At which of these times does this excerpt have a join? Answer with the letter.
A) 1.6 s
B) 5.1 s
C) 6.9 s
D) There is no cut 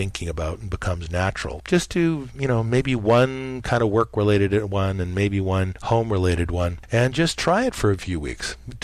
A